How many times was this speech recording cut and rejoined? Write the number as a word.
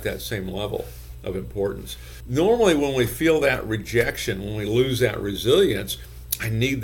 one